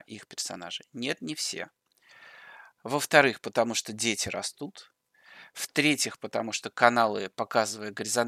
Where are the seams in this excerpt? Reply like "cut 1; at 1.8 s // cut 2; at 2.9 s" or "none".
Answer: cut 1; at 2.7 s